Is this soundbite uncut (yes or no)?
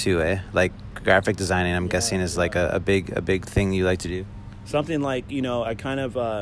yes